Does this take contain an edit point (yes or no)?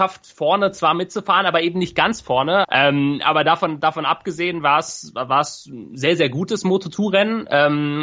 yes